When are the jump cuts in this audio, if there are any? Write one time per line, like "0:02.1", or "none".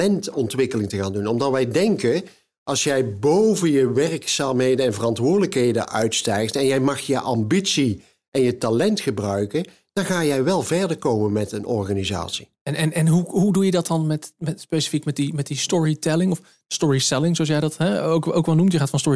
none